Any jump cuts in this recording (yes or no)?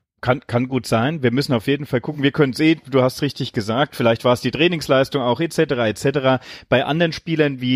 no